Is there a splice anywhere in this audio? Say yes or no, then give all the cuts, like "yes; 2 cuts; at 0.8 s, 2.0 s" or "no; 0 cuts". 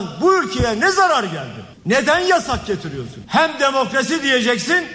no; 0 cuts